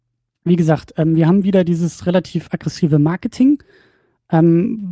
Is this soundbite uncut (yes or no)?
yes